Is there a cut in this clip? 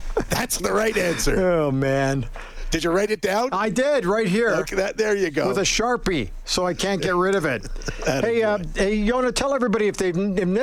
no; 0 cuts

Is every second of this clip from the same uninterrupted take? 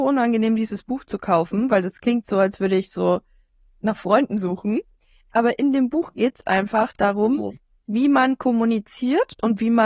yes; 0 cuts

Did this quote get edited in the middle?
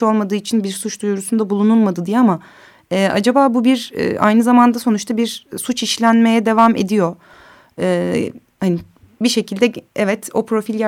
no; 0 cuts

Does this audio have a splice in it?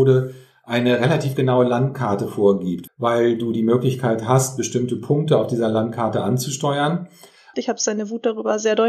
yes; 2 cuts; at 2.9 s, 7.5 s

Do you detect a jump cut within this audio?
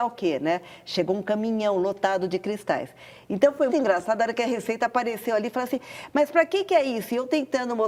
yes; 1 cut; at 3.7 s

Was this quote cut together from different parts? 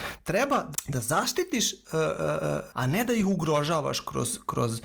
yes; 1 cut; at 2.7 s

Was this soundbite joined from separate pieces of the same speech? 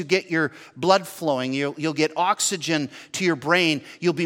no; 0 cuts

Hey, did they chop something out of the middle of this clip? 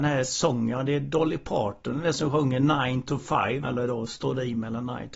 yes; 1 cut; at 3.6 s

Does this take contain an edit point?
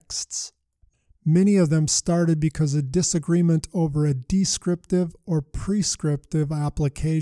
no; 0 cuts

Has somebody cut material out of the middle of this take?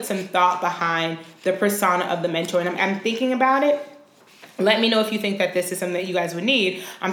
yes; 1 cut; at 2.8 s

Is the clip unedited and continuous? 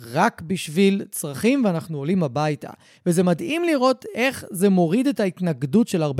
yes; 0 cuts

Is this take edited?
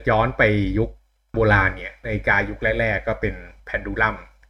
yes; 1 cut; at 1.3 s

